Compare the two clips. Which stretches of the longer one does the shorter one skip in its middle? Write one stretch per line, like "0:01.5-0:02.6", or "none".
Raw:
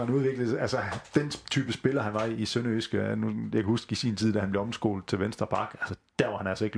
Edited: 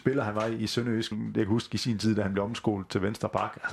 0:02.9-0:03.3